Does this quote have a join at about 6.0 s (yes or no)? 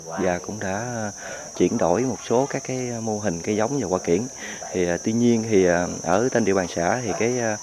no